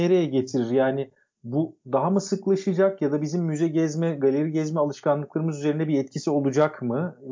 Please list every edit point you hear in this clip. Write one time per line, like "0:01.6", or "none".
none